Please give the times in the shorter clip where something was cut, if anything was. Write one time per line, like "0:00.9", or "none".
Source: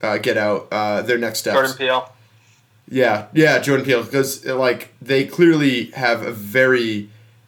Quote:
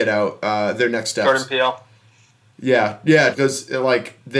0:03.3